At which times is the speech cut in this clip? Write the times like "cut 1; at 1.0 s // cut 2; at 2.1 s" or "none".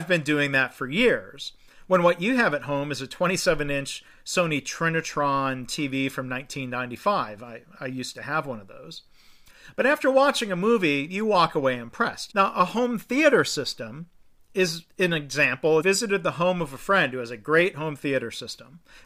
cut 1; at 12.3 s // cut 2; at 15.8 s